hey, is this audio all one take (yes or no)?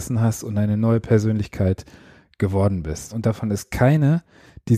no